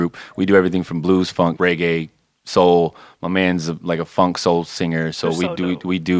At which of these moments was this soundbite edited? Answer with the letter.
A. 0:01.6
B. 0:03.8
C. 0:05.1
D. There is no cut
A